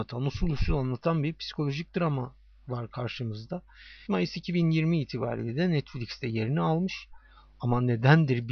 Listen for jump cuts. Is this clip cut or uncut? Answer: cut